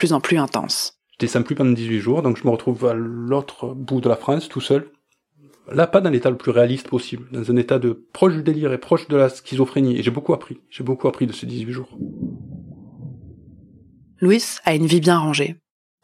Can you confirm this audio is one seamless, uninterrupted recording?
yes; 0 cuts

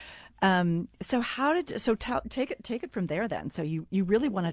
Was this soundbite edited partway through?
no; 0 cuts

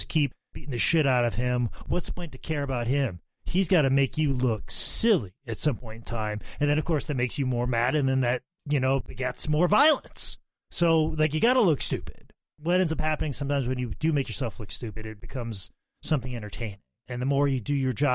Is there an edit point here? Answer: no; 0 cuts

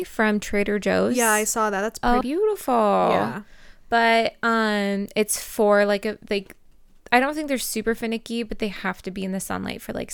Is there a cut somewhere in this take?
yes; 1 cut; at 2.2 s

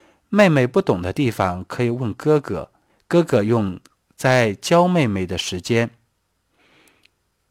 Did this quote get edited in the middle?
no; 0 cuts

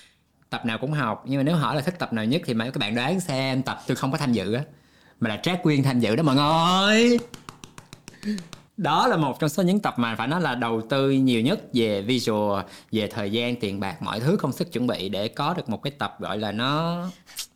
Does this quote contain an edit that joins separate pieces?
yes; 2 cuts; at 3.9 s, 8.7 s

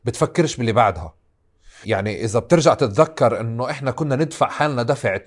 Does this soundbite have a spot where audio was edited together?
yes; 1 cut; at 1.8 s

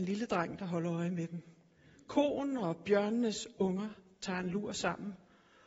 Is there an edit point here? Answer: no; 0 cuts

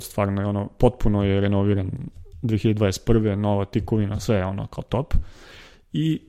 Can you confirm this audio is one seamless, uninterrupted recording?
yes; 0 cuts

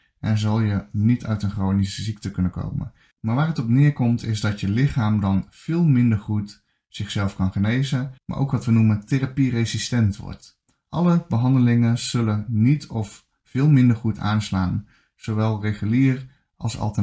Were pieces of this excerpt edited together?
yes; 2 cuts; at 3.1 s, 8.2 s

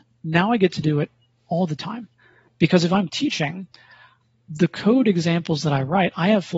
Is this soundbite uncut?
yes; 0 cuts

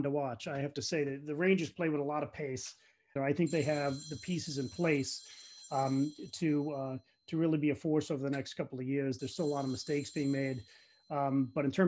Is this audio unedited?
no; 2 cuts; at 3.2 s, 9.2 s

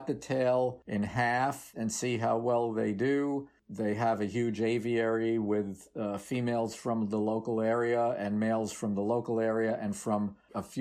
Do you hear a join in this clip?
yes; 1 cut; at 1.7 s

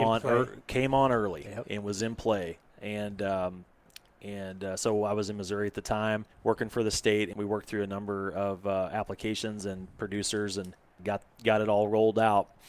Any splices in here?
yes; 3 cuts; at 6.3 s, 7.3 s, 11.0 s

